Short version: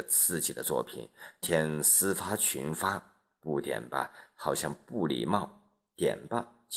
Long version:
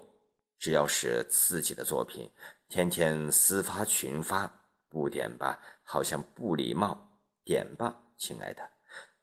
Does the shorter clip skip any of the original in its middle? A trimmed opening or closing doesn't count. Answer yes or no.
yes